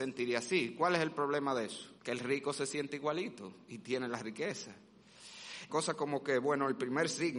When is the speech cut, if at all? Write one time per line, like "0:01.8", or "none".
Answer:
0:02.0
0:05.7

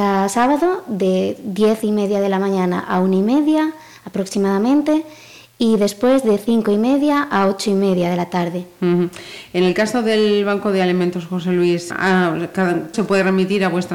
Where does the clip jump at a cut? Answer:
0:11.9
0:12.9

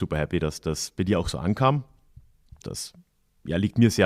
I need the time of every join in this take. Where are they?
0:02.6

